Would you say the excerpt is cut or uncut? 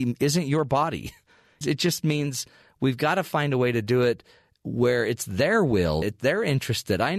cut